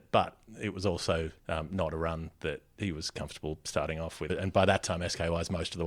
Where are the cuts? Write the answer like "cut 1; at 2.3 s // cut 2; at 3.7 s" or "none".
cut 1; at 1.4 s // cut 2; at 4.3 s